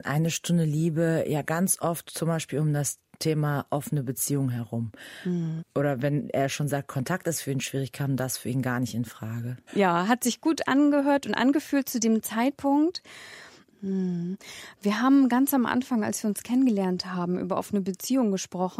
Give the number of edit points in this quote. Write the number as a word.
three